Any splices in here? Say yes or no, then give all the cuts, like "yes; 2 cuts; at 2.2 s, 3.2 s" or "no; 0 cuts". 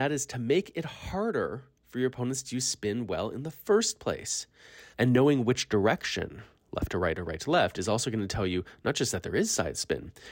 yes; 1 cut; at 4.9 s